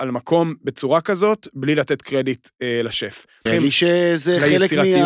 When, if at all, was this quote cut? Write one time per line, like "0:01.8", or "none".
0:03.5